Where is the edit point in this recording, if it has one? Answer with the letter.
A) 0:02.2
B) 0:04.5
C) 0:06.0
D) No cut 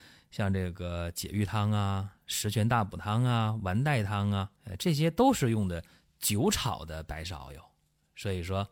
B